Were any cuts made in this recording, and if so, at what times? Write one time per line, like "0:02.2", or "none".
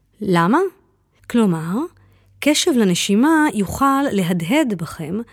0:01.2

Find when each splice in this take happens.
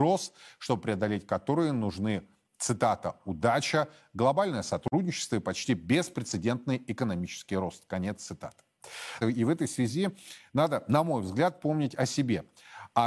0:09.2

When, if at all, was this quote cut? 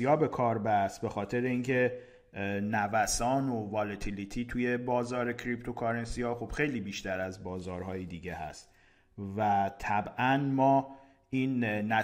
none

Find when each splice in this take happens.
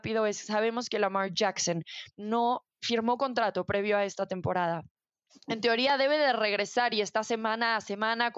0:02.7

